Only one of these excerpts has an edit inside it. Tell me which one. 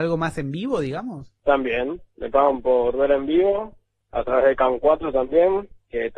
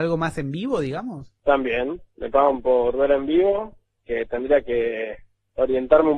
second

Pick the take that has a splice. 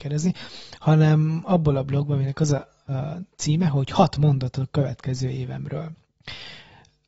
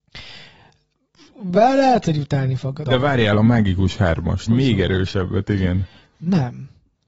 second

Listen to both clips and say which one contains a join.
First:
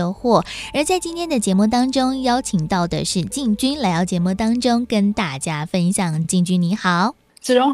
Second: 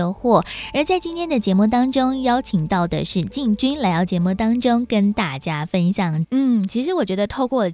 second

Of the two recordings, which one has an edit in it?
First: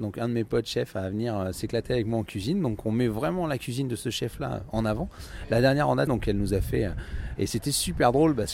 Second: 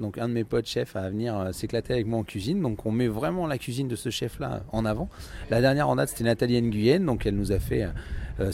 first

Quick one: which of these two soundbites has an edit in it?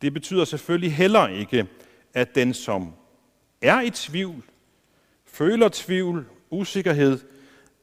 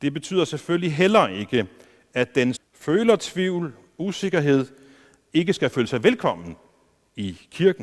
second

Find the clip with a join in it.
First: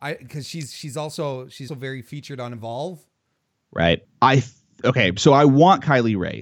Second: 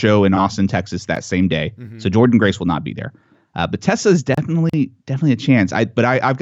first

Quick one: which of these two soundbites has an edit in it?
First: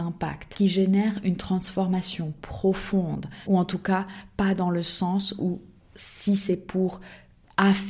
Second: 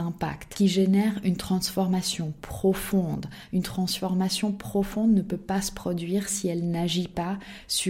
first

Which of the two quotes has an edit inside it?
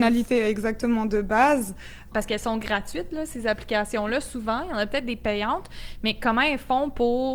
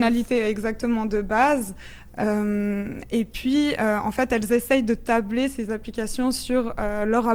first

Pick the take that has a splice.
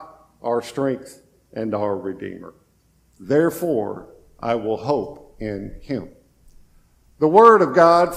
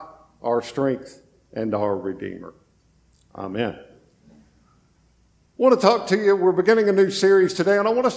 first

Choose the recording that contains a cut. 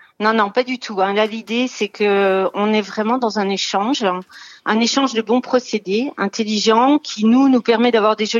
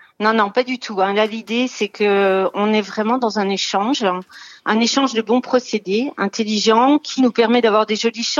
second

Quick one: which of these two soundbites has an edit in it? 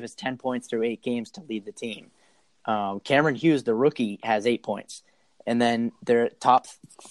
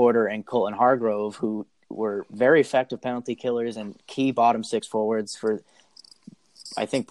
first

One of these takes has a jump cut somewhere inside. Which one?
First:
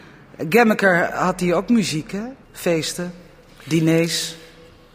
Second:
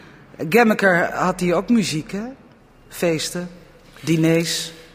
first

